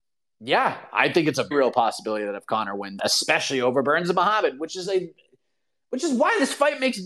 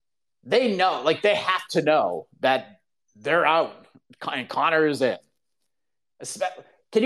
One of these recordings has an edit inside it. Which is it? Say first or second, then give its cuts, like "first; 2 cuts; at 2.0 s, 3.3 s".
first; 2 cuts; at 1.5 s, 3.0 s